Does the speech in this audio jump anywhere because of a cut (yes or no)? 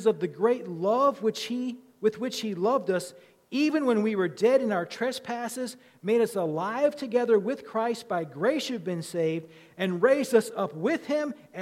no